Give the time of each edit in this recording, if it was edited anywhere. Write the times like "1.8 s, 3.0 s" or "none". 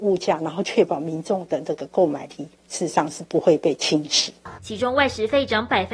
2.6 s, 4.6 s